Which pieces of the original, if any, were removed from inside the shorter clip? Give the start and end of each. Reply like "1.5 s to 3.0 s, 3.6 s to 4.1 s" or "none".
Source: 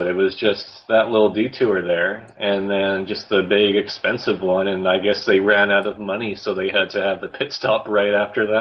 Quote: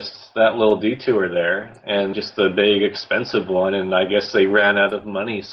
2.7 s to 3.1 s